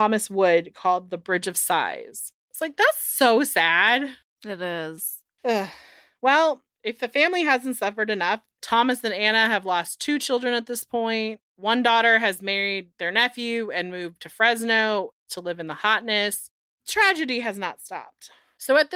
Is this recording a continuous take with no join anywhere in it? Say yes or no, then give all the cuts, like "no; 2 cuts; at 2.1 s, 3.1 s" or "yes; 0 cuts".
yes; 0 cuts